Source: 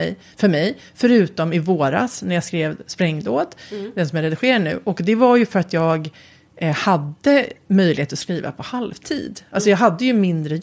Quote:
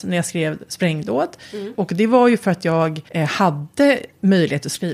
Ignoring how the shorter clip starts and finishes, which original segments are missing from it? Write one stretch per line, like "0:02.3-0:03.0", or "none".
0:03.9-0:04.8
0:06.2-0:06.6

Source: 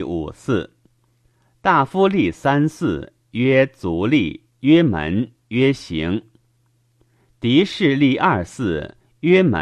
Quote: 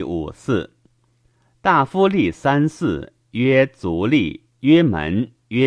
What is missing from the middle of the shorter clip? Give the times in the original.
none

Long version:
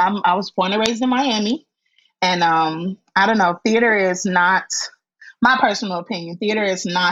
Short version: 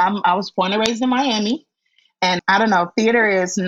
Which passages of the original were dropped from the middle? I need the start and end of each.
0:02.4-0:03.1

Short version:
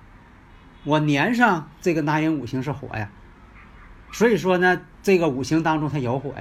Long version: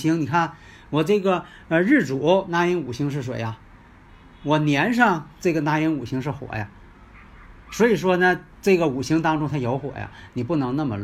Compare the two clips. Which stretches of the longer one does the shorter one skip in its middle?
none

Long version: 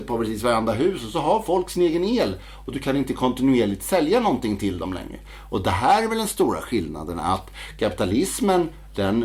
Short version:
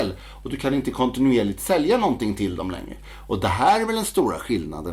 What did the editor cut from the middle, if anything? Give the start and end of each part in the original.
none

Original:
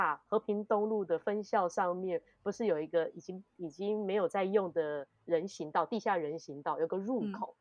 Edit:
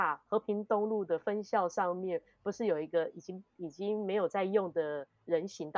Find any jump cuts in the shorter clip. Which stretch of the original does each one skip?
none

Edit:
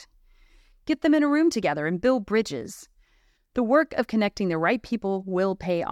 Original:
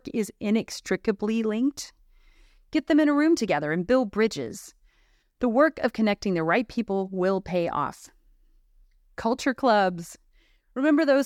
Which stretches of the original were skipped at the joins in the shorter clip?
none

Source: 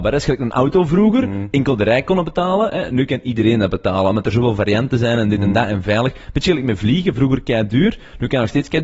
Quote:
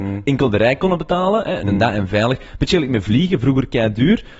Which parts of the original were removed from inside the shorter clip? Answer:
0:02.9-0:05.4

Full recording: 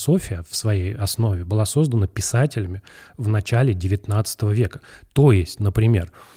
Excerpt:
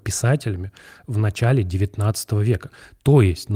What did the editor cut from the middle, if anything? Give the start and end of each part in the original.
none

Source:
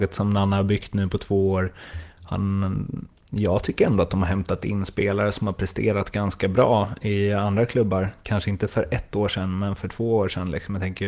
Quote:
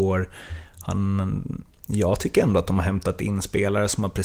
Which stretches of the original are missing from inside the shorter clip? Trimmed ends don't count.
none

